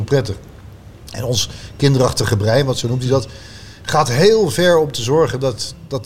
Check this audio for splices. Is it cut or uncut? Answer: uncut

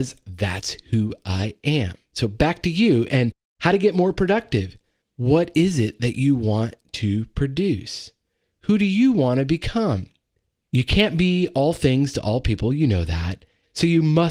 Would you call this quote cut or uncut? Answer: uncut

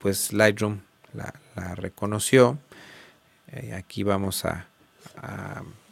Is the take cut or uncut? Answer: uncut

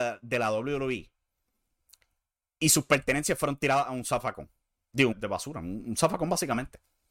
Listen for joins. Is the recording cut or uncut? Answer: cut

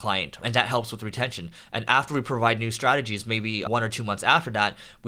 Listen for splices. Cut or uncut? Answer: uncut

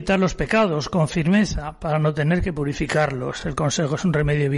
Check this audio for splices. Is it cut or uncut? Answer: uncut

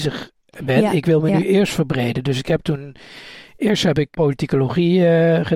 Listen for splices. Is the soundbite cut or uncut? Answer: cut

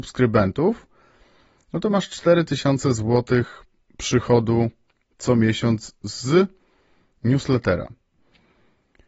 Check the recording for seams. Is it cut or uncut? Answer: uncut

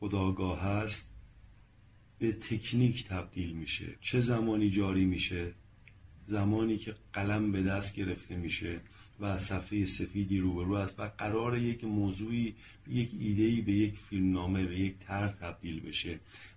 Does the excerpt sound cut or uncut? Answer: cut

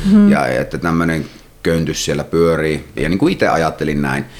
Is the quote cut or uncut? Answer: cut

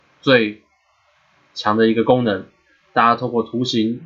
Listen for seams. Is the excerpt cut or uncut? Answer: uncut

